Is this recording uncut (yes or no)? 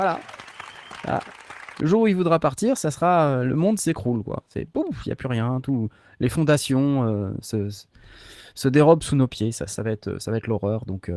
yes